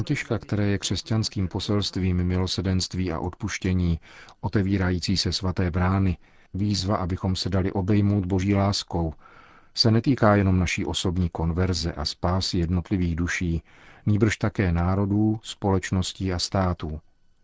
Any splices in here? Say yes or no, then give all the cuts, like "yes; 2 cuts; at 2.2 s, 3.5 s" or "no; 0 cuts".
no; 0 cuts